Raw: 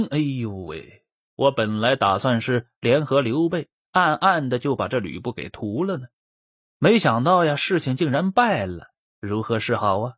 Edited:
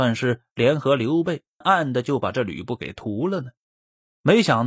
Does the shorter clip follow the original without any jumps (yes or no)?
no